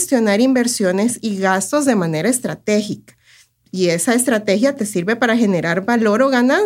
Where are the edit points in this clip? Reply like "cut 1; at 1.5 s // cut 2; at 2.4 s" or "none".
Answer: none